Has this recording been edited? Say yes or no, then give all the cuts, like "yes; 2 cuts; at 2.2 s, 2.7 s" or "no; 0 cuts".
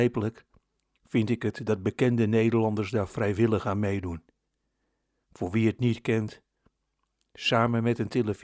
no; 0 cuts